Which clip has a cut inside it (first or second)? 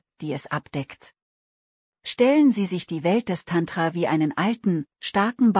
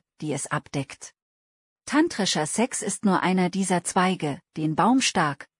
second